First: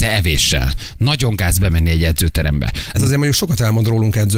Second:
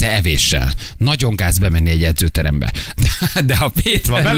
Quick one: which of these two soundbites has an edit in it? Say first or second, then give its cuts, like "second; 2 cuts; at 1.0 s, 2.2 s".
first; 1 cut; at 2.9 s